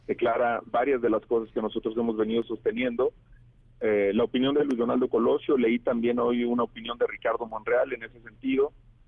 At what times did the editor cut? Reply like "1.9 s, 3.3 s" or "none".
3.6 s